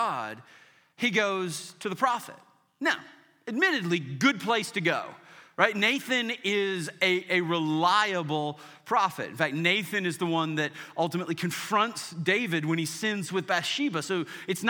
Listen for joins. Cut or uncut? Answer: uncut